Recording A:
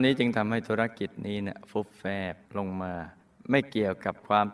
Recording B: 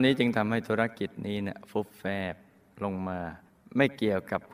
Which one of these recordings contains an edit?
A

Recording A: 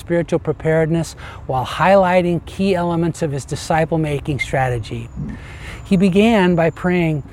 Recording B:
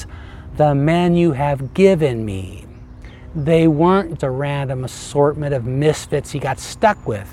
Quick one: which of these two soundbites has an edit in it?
B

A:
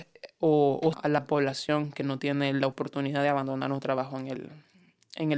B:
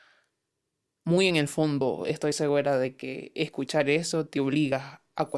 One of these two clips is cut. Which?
A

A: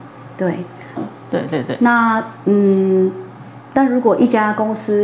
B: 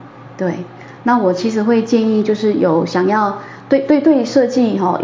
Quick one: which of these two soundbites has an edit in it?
A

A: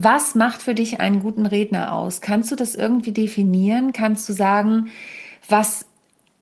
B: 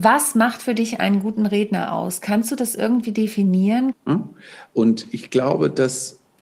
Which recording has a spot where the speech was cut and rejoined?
B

